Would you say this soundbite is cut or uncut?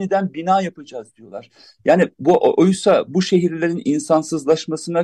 cut